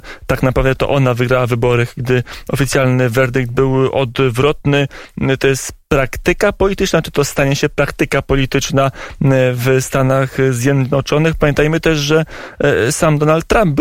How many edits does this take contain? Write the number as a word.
zero